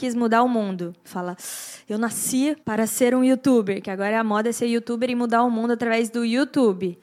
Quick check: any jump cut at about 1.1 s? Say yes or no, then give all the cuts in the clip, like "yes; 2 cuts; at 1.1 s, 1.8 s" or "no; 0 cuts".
yes; 2 cuts; at 1.1 s, 2.6 s